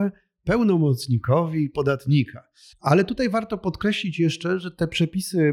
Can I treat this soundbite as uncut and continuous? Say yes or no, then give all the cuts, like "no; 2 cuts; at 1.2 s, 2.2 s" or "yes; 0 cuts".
no; 1 cut; at 2.7 s